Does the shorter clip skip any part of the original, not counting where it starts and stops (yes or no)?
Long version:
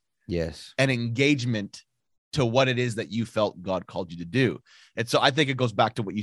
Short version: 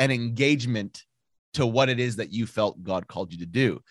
no